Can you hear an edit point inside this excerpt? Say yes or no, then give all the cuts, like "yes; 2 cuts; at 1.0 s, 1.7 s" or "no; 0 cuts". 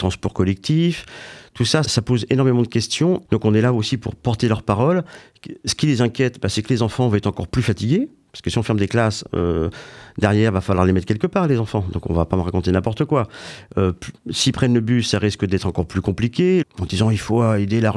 yes; 3 cuts; at 1.8 s, 3.2 s, 16.6 s